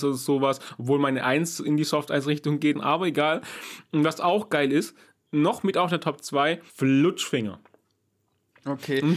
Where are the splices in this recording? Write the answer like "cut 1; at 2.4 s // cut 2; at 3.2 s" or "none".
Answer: cut 1; at 2.7 s // cut 2; at 6.7 s